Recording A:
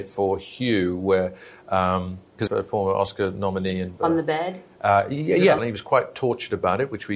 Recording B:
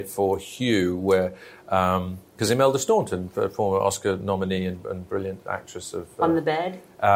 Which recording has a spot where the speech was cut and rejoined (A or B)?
A